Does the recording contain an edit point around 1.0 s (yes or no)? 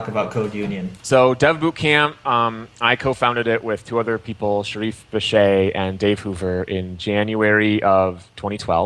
yes